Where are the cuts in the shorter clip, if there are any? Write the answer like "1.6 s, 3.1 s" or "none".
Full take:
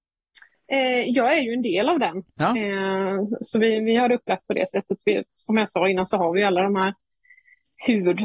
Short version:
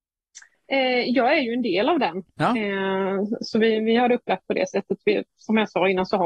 none